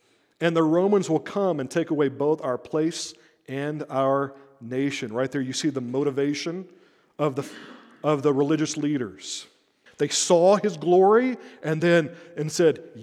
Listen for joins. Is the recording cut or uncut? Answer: cut